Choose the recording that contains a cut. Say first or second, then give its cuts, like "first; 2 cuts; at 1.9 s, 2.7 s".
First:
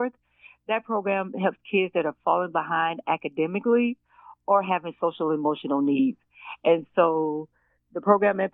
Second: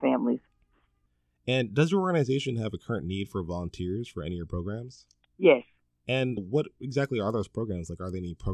second; 1 cut; at 6.4 s